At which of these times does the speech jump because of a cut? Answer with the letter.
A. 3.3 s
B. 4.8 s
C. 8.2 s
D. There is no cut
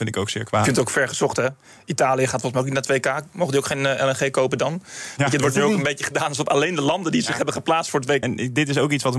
C